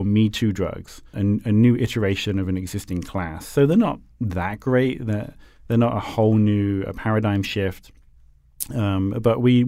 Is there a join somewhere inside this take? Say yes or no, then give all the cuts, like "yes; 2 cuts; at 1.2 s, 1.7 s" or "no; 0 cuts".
yes; 1 cut; at 1.1 s